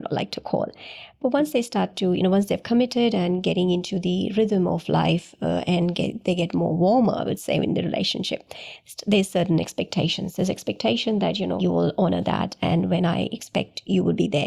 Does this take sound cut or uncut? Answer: cut